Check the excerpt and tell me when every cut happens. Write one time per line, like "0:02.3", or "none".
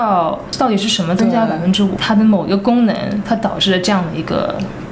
0:02.0